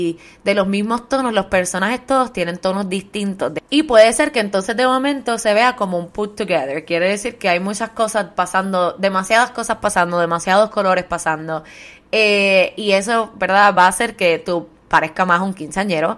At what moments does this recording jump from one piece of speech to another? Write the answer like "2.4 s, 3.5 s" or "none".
none